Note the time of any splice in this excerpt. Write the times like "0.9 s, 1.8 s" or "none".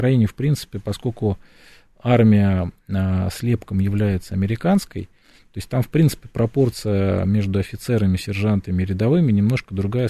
none